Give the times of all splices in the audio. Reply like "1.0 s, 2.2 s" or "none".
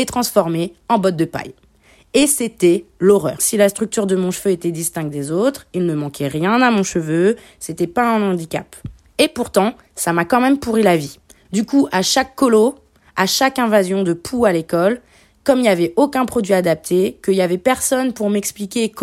3.4 s, 11.4 s